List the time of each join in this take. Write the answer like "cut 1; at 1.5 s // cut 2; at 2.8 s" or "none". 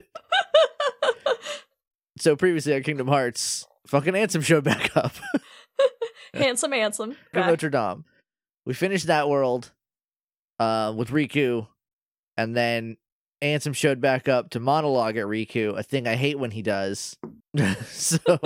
cut 1; at 7.3 s // cut 2; at 17.4 s